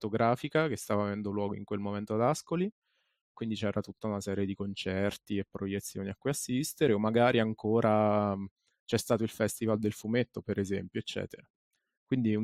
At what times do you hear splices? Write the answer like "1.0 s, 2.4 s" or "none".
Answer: none